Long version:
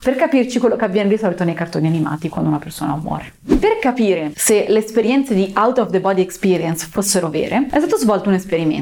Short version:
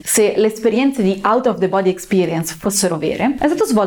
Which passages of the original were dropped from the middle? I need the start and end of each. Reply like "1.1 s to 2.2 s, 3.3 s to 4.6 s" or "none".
none